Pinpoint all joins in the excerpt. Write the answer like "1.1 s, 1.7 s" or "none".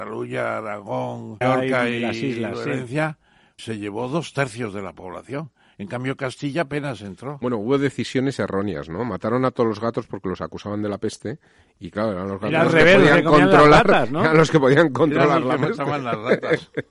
1.4 s, 3.6 s